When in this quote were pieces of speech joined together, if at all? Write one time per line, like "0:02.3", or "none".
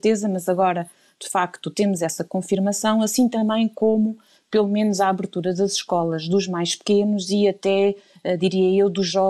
none